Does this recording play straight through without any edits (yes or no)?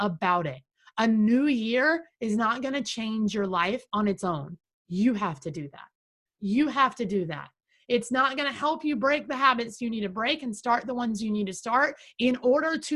no